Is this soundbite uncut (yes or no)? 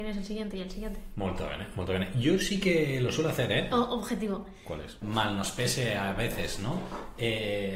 no